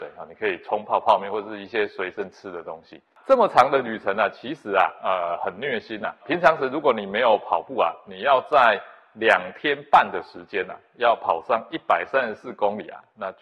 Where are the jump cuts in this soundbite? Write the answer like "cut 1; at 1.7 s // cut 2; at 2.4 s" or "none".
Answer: none